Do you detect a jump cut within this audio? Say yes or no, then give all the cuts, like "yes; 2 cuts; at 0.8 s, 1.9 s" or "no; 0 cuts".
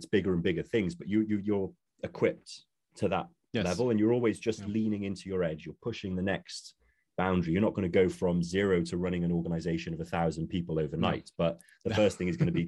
no; 0 cuts